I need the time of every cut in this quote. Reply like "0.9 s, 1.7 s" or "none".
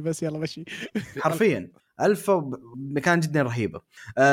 1.1 s

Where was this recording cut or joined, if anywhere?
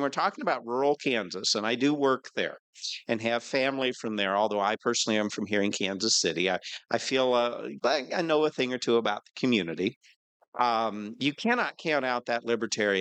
7.8 s

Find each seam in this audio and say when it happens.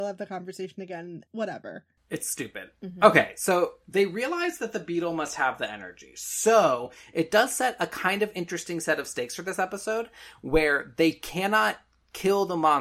1.3 s

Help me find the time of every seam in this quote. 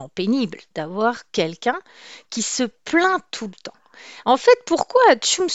none

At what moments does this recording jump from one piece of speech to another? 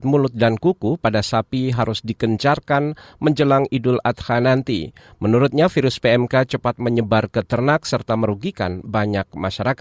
none

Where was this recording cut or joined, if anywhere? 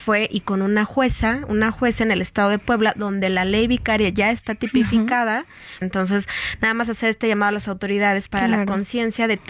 5.8 s

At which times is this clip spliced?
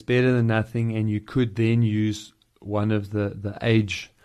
none

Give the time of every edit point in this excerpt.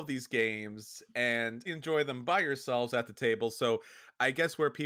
1.7 s

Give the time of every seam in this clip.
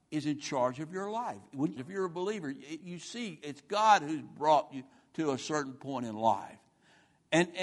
1.8 s, 2.8 s

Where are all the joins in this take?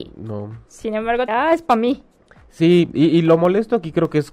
1.3 s

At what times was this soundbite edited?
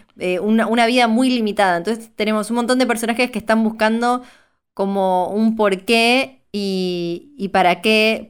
none

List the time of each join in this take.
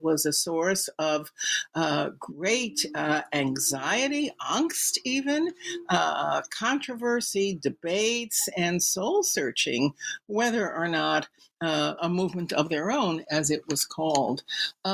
12.0 s, 13.2 s

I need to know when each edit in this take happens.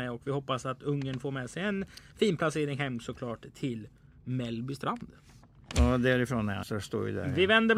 6.6 s

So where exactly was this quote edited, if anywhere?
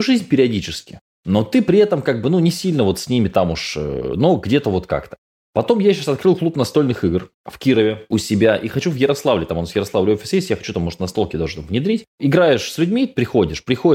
none

